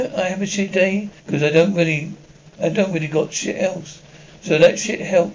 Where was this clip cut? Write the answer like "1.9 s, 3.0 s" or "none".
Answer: 1.2 s